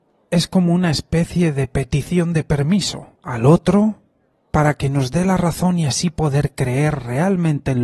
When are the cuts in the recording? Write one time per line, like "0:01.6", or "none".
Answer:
none